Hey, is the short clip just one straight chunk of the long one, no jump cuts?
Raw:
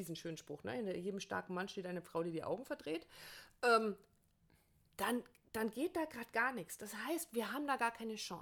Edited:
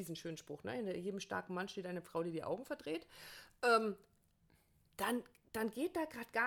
yes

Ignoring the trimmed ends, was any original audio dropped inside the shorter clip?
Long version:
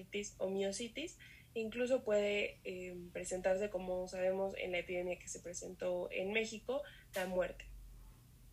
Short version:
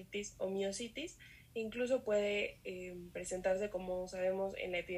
no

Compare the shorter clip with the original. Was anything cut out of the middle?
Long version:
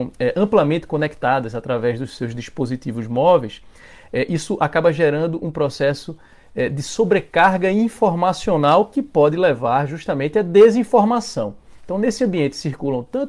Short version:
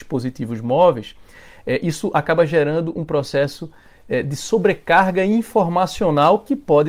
no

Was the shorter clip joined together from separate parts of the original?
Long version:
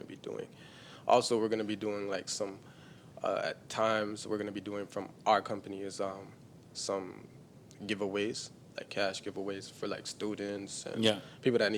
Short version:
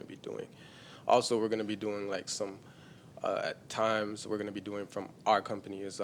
no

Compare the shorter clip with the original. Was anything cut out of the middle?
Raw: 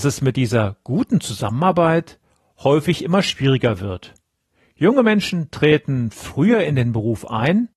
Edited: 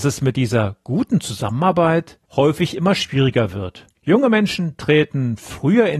yes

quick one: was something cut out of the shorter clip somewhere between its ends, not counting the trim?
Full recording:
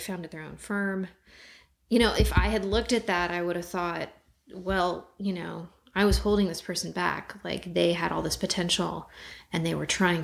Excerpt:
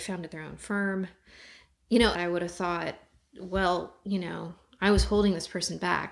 yes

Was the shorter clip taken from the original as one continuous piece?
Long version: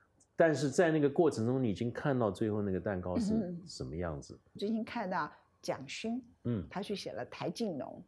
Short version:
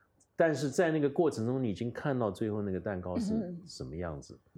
yes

